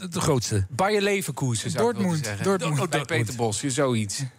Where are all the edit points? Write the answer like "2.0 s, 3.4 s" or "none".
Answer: none

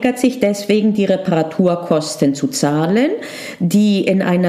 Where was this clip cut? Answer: none

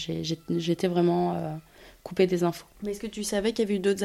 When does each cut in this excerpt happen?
2.7 s

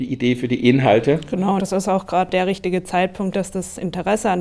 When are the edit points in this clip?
1.6 s, 3.3 s

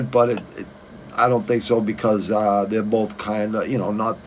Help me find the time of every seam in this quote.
1.2 s

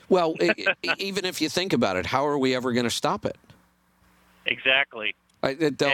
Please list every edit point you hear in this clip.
none

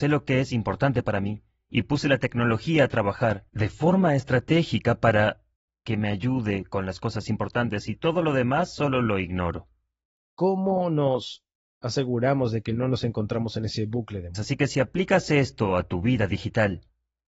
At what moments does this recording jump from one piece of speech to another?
10.1 s, 14.3 s

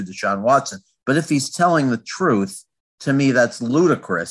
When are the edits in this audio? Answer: none

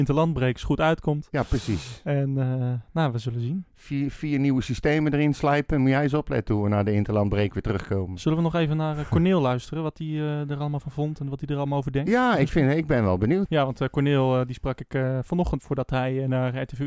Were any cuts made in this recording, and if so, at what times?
13.5 s, 15.6 s

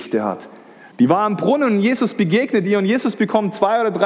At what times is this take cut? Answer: 0.9 s

